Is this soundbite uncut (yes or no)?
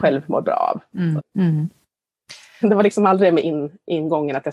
no